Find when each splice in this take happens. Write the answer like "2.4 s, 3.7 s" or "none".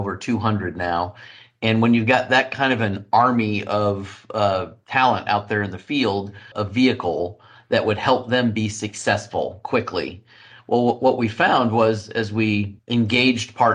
6.5 s, 12.8 s